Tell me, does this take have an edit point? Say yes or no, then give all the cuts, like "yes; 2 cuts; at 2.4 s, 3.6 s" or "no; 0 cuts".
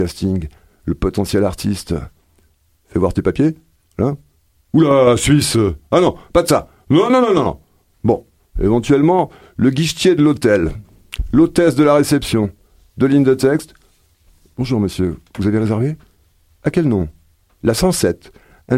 no; 0 cuts